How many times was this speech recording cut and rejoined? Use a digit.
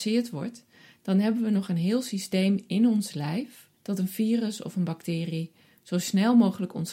1